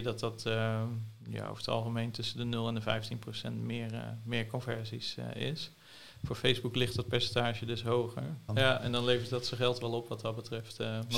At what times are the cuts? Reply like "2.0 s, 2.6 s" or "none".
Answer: 8.5 s